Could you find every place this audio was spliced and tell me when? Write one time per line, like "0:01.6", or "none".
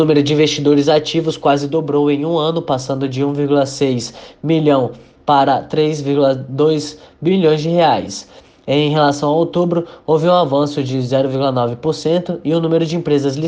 none